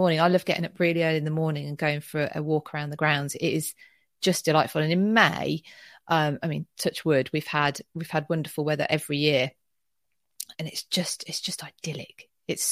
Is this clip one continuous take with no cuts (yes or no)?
no